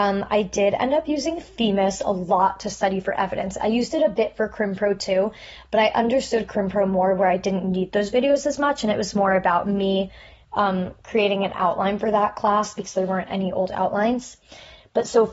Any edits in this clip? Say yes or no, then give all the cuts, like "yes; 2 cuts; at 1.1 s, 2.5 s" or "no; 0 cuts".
no; 0 cuts